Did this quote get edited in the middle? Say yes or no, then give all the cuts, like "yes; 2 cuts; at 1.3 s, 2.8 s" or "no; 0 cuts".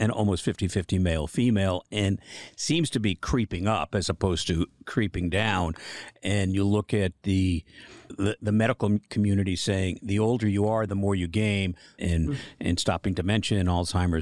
yes; 1 cut; at 12.0 s